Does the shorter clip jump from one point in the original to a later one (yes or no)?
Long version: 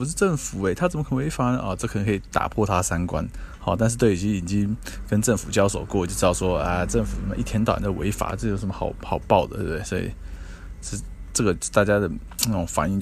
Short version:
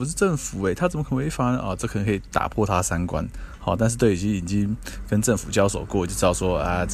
no